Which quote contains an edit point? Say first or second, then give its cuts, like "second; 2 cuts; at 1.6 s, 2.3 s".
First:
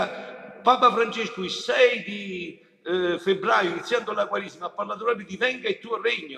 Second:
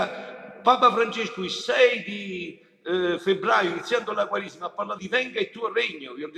second; 1 cut; at 5.0 s